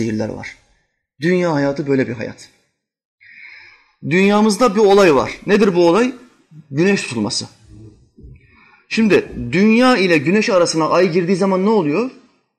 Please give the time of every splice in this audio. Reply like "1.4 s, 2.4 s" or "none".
none